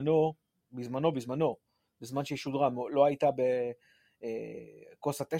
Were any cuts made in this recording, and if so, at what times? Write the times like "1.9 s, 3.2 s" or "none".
none

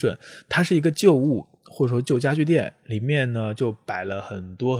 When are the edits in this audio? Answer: none

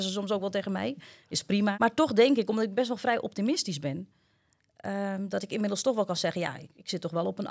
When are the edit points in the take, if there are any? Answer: 1.7 s

